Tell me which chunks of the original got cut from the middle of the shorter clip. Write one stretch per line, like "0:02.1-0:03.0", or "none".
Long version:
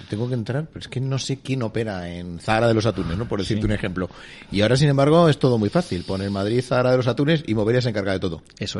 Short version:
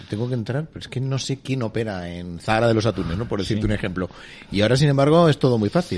none

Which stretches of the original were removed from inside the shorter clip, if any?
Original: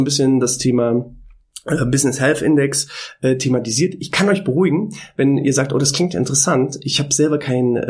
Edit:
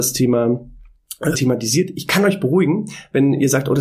0:01.8-0:03.4

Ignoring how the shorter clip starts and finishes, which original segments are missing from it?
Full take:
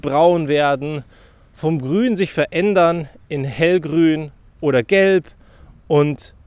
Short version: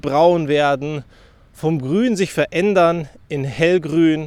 none

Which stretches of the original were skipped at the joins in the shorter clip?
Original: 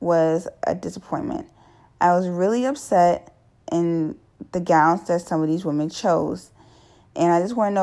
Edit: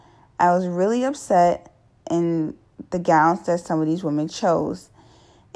none

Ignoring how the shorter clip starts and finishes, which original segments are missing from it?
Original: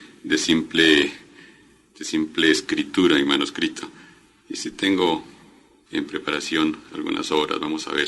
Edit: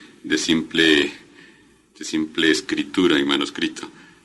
none

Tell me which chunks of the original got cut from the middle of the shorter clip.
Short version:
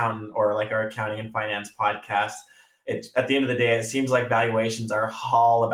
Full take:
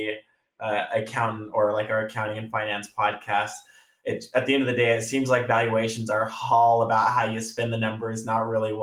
none

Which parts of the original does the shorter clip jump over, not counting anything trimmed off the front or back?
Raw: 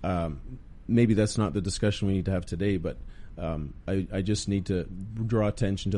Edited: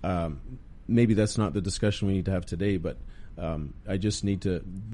0:03.8-0:04.1

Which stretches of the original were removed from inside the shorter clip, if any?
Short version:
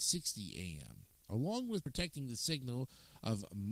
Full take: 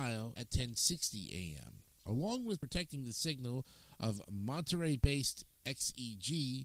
none

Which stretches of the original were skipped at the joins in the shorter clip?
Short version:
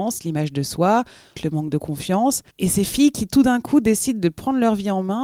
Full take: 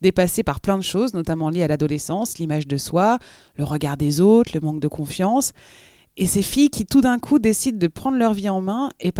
0:03.5-0:04.5
0:05.6-0:06.1

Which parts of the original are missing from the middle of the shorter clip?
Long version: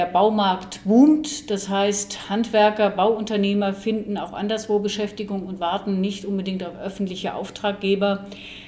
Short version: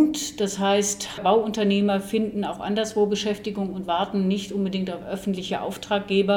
0:02.3-0:02.9

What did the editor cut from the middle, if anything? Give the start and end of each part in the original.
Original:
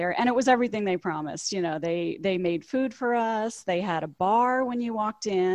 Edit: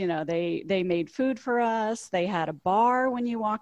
none

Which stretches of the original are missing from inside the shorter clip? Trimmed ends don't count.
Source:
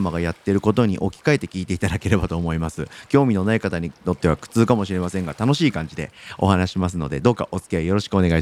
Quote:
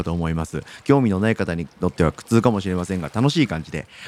none

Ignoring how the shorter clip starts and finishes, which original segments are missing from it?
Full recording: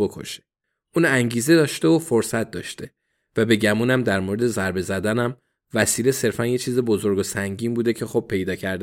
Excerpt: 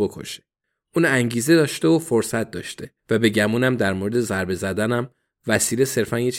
0:03.0-0:03.3

